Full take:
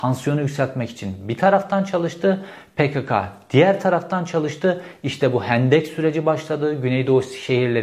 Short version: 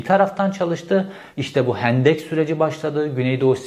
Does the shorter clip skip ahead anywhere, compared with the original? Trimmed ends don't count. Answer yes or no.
yes